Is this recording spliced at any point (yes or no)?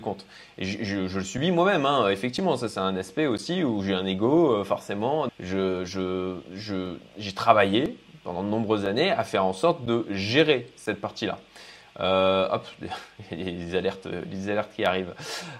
yes